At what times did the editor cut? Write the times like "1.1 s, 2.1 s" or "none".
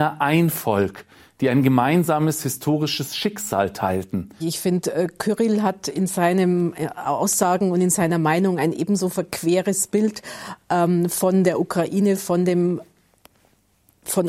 4.4 s